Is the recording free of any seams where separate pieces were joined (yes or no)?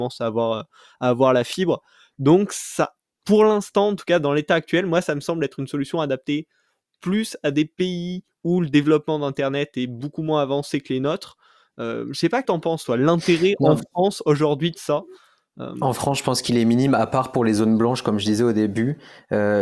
no